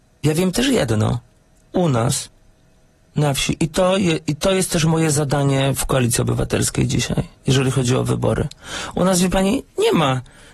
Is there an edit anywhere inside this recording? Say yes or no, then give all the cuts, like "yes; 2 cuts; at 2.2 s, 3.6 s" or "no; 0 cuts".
no; 0 cuts